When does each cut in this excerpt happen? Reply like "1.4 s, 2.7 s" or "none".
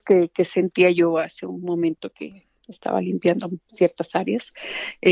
2.6 s